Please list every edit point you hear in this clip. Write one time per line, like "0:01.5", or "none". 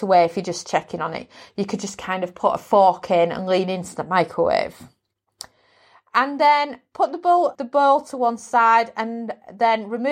0:07.6